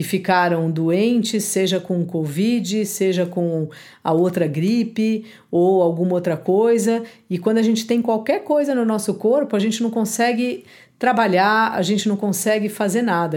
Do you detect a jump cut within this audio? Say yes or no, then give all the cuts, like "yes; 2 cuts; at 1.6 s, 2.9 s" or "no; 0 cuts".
no; 0 cuts